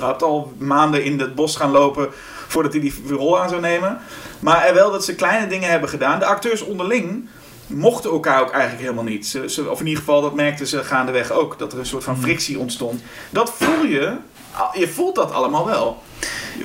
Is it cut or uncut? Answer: uncut